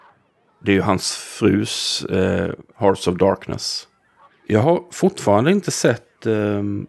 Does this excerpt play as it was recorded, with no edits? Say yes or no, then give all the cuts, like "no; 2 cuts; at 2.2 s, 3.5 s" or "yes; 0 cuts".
no; 2 cuts; at 2.7 s, 4.3 s